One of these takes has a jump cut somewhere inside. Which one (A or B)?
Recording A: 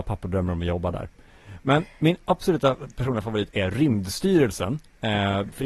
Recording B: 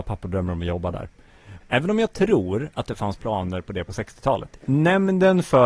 B